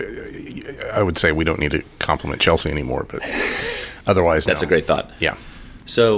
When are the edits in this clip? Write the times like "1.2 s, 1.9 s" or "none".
none

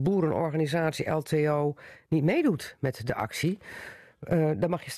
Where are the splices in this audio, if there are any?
none

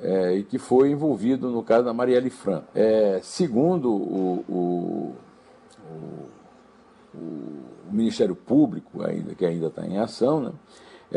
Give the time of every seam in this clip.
2.7 s

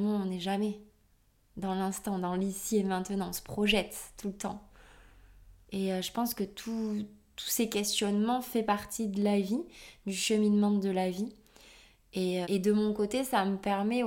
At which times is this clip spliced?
5.6 s, 12.4 s

